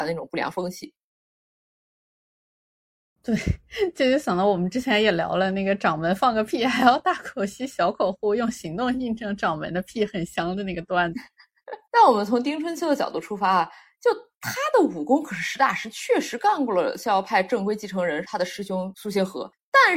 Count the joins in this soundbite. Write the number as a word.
one